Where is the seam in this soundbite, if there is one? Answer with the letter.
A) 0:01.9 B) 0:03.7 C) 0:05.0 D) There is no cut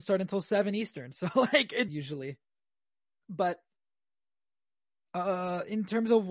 A